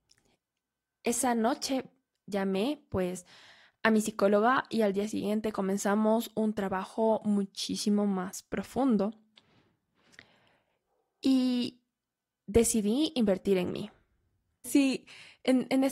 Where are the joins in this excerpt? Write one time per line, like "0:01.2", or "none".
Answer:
0:14.6

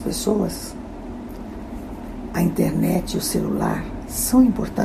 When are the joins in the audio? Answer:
none

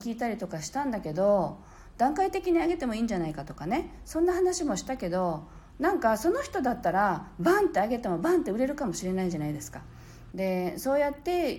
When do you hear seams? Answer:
0:10.3

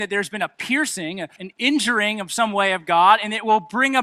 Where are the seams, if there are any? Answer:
0:01.4

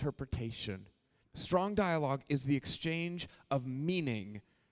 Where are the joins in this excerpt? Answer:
0:01.2

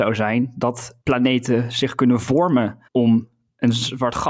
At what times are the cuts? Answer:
0:01.0
0:02.9

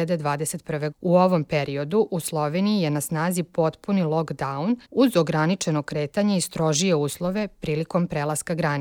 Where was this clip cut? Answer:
0:00.9
0:04.8

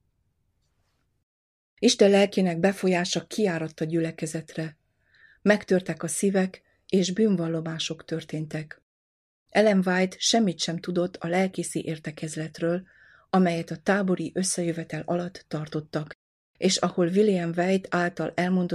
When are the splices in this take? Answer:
0:09.5

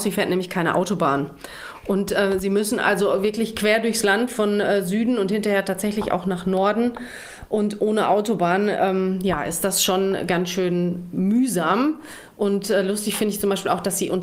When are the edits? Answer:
none

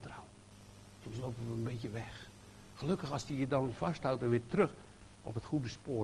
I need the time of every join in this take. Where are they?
none

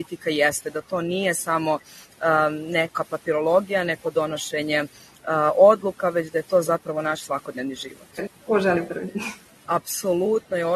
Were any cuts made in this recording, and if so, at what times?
0:08.3
0:09.7

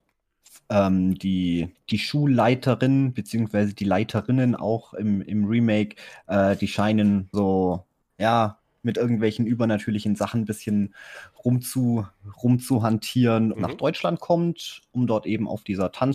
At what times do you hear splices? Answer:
0:01.7
0:07.3
0:13.5

